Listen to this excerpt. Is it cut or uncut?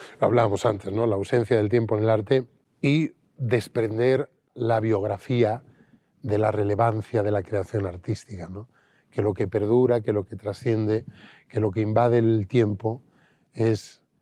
uncut